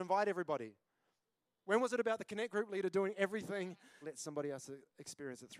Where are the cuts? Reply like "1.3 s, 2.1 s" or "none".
4.0 s